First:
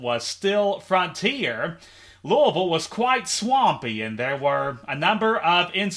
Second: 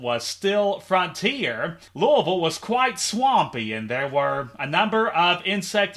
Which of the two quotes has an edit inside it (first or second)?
second